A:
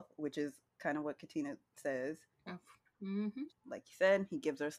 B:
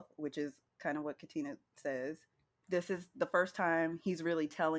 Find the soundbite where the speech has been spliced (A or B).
A